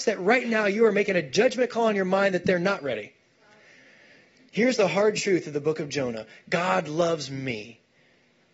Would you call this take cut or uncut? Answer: cut